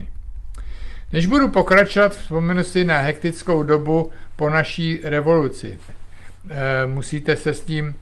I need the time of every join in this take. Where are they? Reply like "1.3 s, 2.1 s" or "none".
5.9 s